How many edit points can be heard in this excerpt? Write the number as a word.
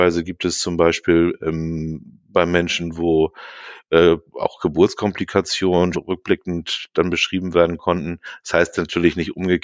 one